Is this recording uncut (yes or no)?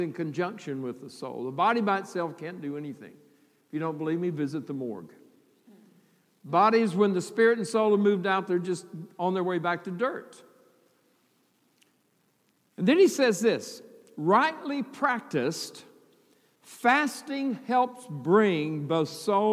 yes